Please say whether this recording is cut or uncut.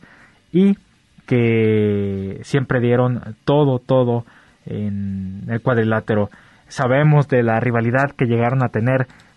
uncut